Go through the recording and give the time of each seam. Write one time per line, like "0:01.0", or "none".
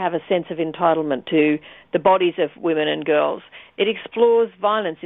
none